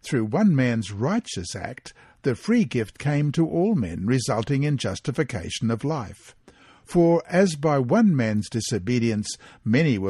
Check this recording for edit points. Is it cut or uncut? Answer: uncut